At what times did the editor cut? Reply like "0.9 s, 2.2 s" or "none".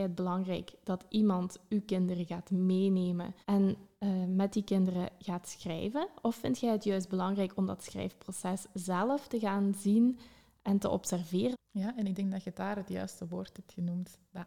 3.4 s, 11.5 s